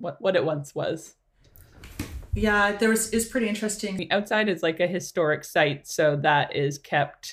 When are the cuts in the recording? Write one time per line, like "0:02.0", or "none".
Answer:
0:04.0